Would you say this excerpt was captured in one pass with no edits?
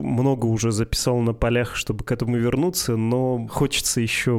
yes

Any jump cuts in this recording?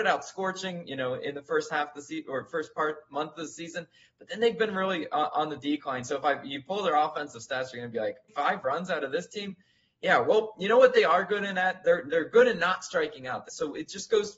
yes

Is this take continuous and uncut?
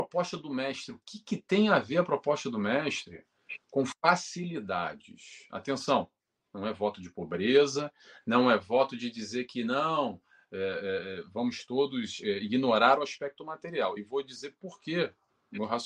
yes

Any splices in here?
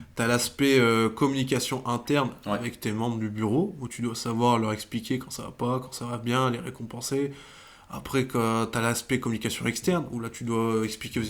no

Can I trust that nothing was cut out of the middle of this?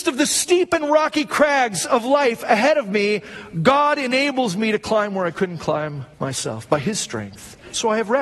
no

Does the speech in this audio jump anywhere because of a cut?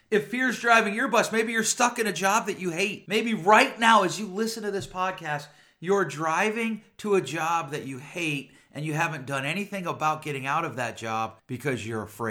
no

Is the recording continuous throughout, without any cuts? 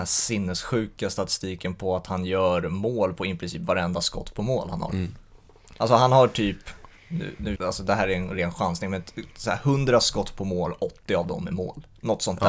no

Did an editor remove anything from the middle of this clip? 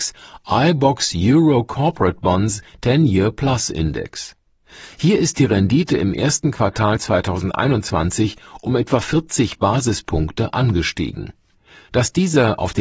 no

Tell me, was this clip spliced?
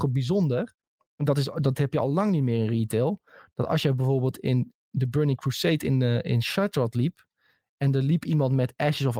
no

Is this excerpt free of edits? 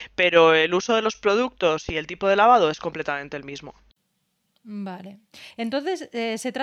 yes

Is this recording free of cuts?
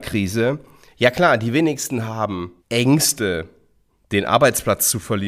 no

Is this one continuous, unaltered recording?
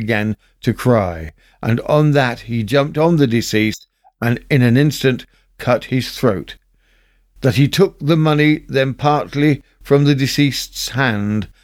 yes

